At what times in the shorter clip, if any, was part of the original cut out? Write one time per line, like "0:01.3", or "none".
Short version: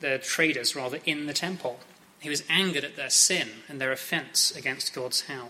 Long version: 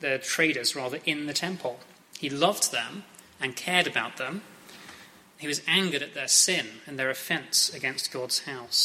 0:02.0